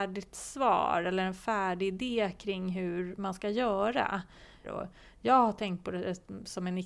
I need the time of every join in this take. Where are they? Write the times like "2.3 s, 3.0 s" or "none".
4.6 s